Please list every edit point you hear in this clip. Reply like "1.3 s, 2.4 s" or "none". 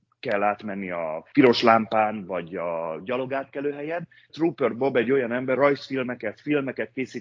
4.3 s, 5.5 s